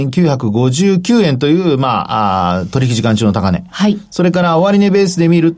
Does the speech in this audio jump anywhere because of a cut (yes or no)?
no